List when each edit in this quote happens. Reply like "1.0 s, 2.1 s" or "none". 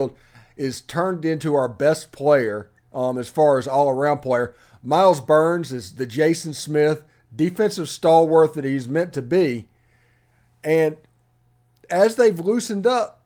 none